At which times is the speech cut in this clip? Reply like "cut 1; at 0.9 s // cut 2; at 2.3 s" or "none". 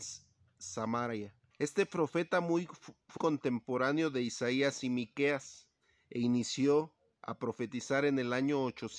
cut 1; at 1.5 s // cut 2; at 3.2 s